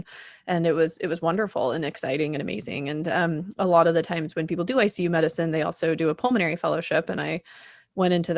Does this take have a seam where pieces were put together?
no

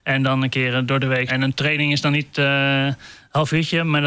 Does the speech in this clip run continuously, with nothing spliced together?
no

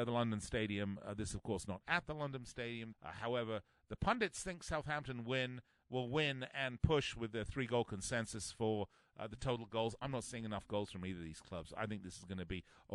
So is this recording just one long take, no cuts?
no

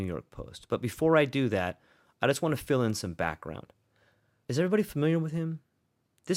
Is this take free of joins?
no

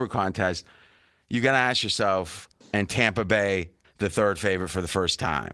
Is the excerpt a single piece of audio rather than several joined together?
no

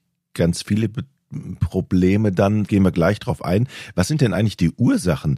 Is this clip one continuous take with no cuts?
no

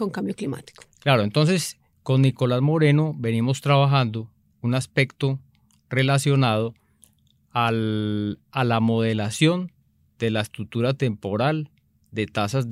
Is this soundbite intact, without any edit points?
yes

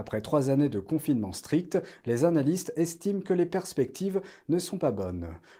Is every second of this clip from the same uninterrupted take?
yes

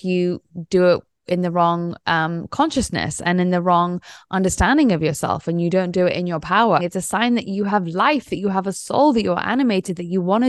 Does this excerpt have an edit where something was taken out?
yes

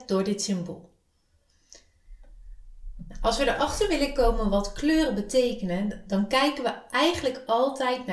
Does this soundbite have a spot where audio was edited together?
no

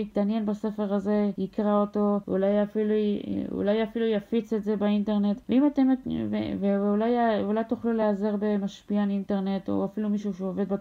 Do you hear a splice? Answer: no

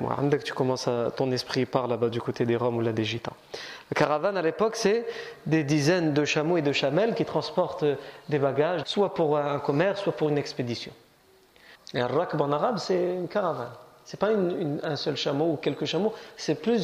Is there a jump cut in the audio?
yes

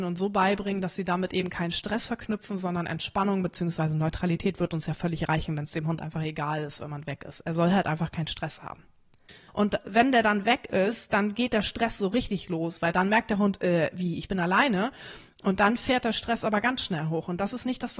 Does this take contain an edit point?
yes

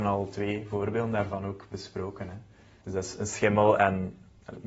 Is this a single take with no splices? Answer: no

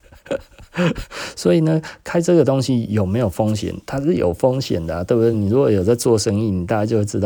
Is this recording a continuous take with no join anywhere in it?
yes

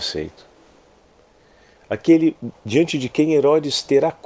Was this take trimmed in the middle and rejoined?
no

